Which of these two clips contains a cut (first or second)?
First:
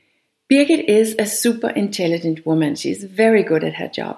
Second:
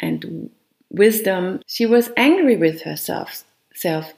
second